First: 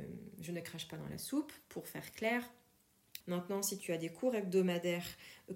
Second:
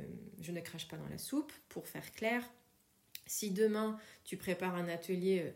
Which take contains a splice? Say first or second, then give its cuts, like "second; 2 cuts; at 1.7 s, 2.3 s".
first; 1 cut; at 3.2 s